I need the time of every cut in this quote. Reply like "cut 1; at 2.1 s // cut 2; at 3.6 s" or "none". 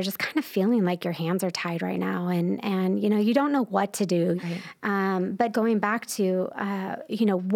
cut 1; at 4.4 s // cut 2; at 5.5 s

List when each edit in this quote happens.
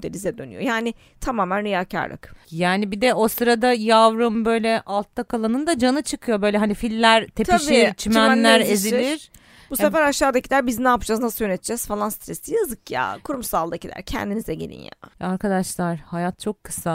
none

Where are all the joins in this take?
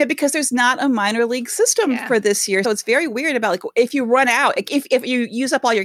cut 1; at 2.6 s

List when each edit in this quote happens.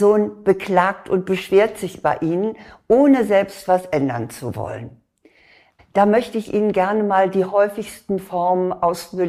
cut 1; at 5.8 s

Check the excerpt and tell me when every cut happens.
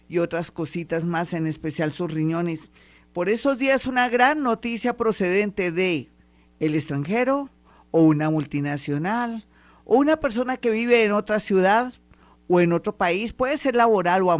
none

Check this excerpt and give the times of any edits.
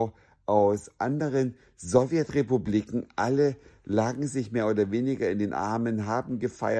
none

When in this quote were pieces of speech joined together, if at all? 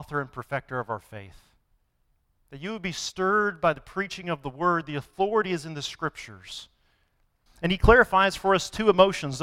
cut 1; at 7.5 s

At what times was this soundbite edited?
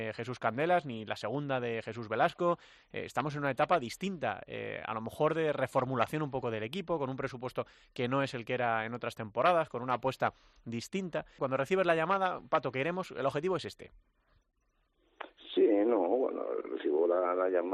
cut 1; at 11.4 s

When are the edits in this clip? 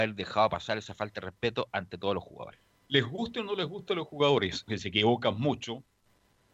cut 1; at 2.7 s // cut 2; at 4.7 s

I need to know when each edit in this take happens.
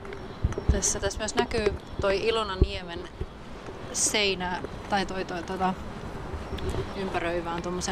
cut 1; at 1.0 s // cut 2; at 6.9 s

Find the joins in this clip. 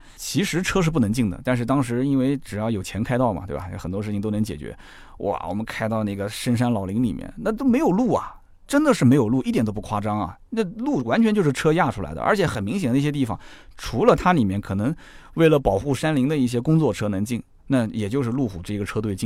none

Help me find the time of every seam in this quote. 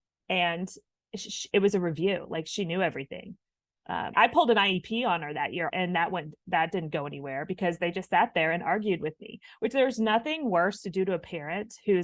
cut 1; at 4.1 s // cut 2; at 5.7 s

